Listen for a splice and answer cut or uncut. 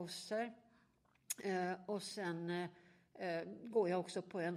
uncut